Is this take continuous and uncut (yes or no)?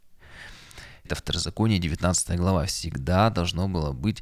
no